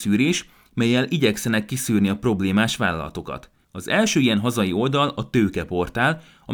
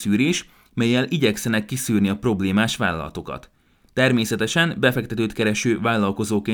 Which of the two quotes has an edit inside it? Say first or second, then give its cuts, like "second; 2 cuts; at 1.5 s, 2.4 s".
first; 1 cut; at 3.6 s